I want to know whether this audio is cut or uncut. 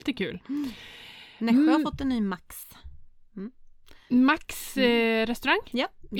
uncut